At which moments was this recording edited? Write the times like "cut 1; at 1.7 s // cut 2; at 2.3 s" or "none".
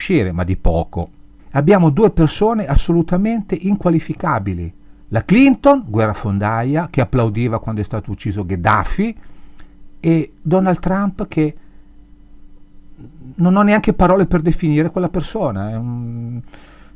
cut 1; at 1.4 s // cut 2; at 5.0 s